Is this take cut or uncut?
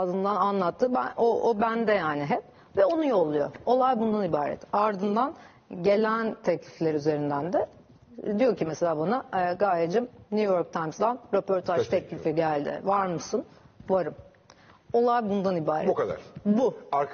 uncut